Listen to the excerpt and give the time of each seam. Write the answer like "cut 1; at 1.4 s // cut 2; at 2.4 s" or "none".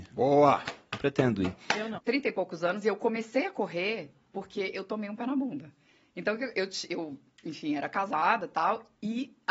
cut 1; at 2.0 s